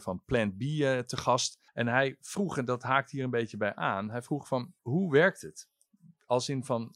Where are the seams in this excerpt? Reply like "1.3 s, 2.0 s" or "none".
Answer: 1.7 s, 4.8 s